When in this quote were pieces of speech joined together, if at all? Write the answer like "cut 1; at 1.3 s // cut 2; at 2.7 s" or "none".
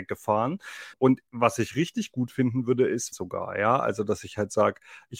cut 1; at 0.9 s // cut 2; at 3.1 s